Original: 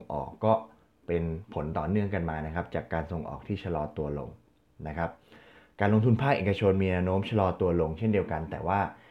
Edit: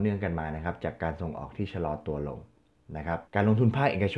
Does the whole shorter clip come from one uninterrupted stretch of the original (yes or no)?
no